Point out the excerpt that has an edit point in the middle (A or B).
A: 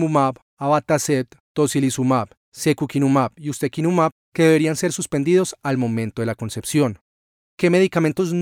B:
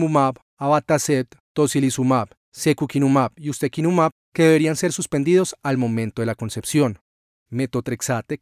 B